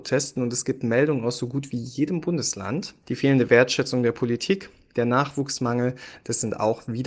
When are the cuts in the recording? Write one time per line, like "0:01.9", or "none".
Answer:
0:03.0